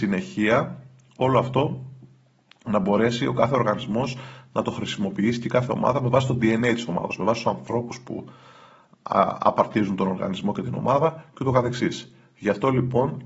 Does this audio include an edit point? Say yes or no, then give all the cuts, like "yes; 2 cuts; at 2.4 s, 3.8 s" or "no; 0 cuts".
no; 0 cuts